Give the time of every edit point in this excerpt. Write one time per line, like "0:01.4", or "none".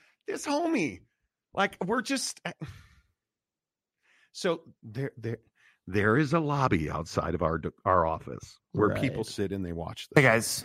none